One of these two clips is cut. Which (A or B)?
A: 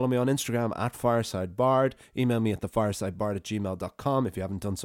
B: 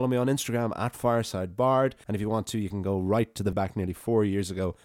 B